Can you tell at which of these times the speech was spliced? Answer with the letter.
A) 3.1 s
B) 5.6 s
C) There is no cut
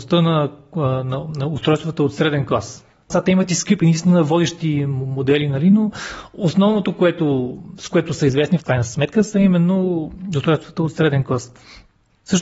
A